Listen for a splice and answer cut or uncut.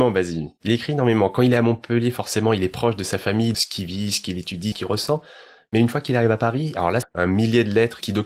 cut